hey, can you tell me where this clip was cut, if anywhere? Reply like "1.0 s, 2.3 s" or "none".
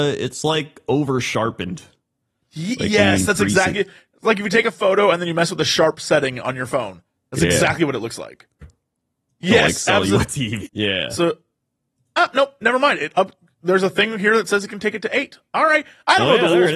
8.6 s, 10.7 s